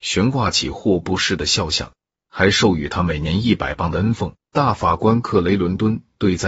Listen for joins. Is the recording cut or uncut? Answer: cut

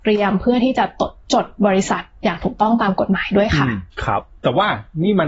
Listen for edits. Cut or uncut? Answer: cut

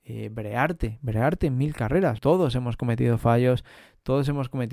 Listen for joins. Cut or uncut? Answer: cut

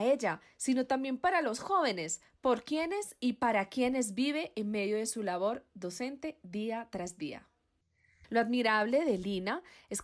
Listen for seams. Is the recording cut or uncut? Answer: cut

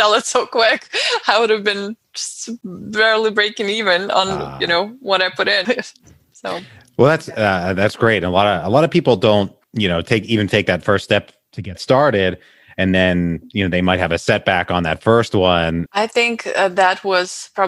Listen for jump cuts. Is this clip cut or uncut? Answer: cut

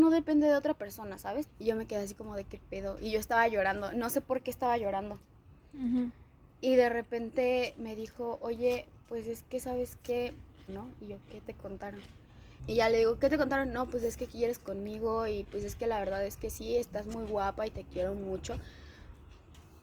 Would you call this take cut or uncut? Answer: cut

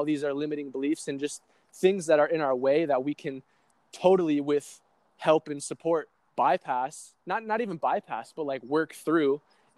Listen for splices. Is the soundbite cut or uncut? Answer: uncut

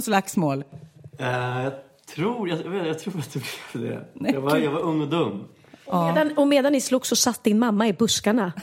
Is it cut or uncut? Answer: uncut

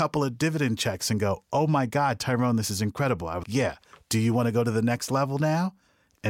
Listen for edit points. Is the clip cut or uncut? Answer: cut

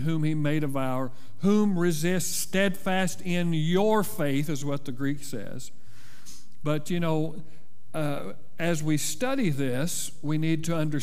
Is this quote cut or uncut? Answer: cut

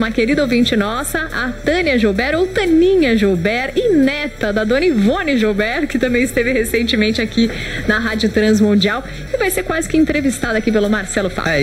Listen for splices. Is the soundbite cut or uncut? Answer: cut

